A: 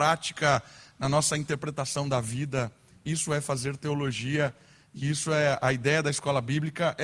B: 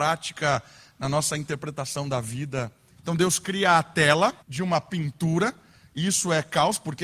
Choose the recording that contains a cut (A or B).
B